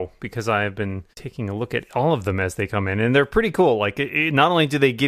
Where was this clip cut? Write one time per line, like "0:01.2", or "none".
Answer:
0:01.1